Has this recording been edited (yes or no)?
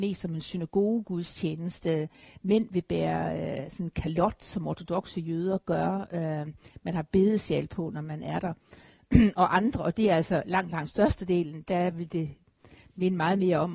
no